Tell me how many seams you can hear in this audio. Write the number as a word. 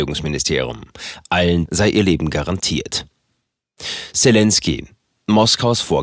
one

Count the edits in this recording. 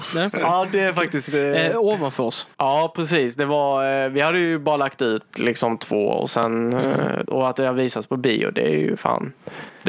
two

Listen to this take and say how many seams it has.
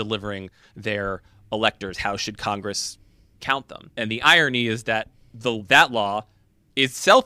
zero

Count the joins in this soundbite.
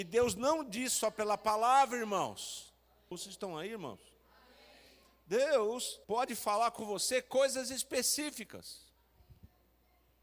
two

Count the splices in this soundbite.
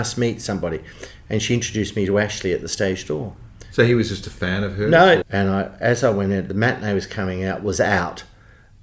one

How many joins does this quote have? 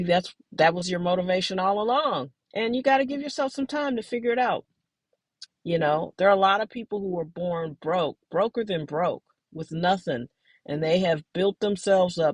two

